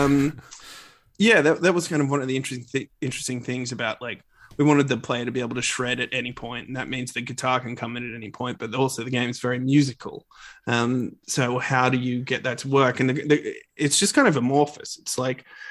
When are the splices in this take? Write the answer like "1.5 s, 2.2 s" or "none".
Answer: none